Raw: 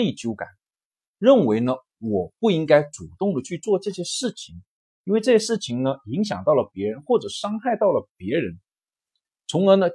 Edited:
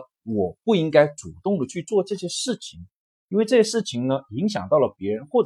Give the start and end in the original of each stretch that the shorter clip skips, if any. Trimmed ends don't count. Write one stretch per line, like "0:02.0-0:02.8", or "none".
none